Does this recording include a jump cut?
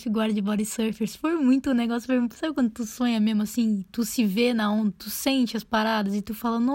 no; 0 cuts

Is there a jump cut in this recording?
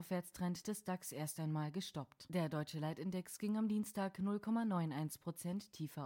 no; 0 cuts

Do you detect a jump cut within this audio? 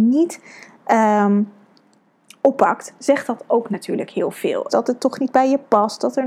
yes; 1 cut; at 4.7 s

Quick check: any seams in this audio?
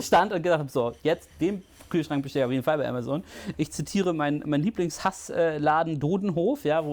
yes; 1 cut; at 3.5 s

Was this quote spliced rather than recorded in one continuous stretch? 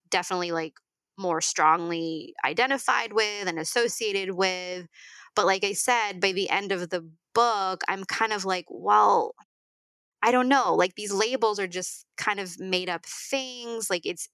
no; 0 cuts

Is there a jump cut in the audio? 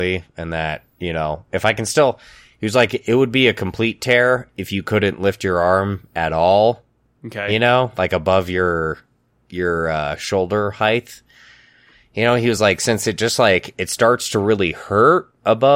no; 0 cuts

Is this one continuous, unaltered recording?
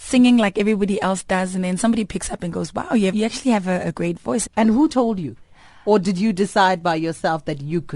no; 2 cuts; at 3.1 s, 4.5 s

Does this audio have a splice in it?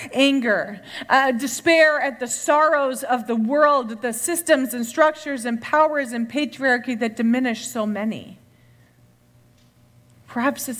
no; 0 cuts

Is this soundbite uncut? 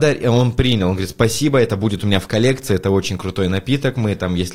yes; 0 cuts

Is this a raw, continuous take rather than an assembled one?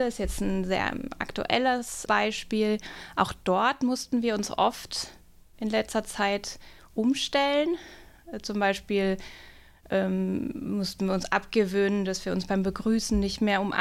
yes; 0 cuts

